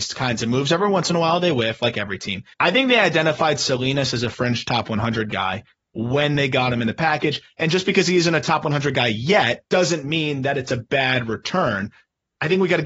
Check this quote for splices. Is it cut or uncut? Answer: cut